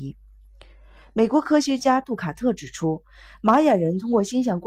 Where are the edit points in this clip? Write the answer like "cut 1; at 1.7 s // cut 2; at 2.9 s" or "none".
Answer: none

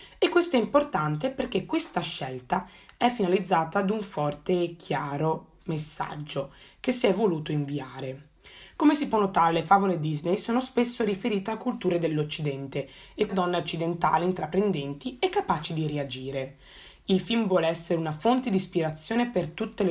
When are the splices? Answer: cut 1; at 13.3 s

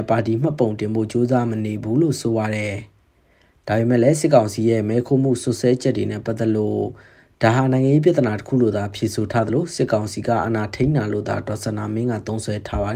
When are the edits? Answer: none

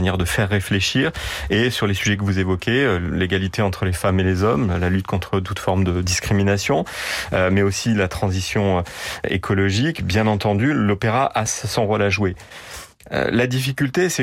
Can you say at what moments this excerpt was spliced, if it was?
none

